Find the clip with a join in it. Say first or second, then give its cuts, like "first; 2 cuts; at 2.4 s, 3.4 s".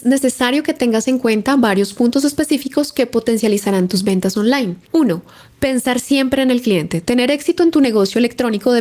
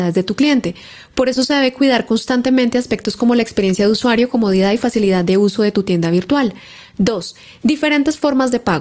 first; 1 cut; at 4.8 s